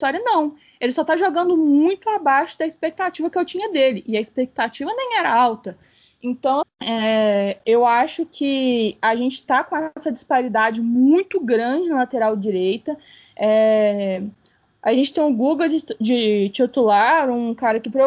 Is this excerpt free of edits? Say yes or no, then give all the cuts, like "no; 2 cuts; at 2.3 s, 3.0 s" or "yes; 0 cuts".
no; 1 cut; at 6.6 s